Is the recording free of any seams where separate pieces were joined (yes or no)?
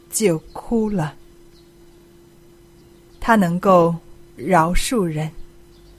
no